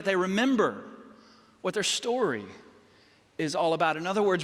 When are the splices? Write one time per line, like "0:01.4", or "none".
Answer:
none